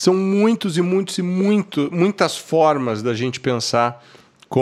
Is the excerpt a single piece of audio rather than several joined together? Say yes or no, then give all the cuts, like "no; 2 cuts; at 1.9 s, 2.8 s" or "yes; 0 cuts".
yes; 0 cuts